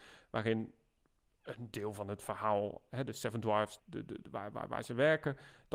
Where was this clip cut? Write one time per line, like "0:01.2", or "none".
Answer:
0:03.8